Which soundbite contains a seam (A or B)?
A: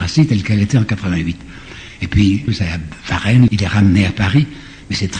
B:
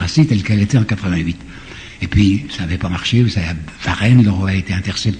A